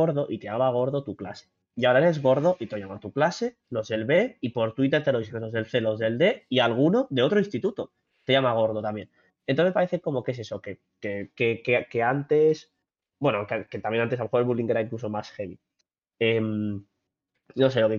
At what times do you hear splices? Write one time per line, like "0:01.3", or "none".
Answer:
none